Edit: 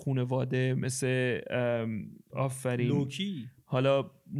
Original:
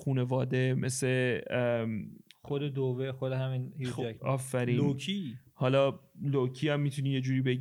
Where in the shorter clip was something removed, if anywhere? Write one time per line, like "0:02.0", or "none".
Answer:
0:02.3